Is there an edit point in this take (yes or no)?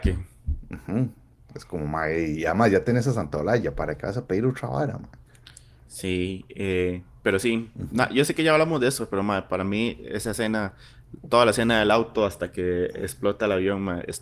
no